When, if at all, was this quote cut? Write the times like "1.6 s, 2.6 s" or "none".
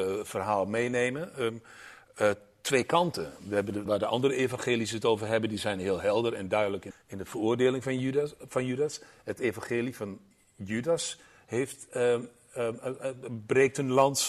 3.9 s, 6.9 s